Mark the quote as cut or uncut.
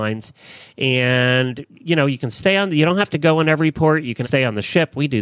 cut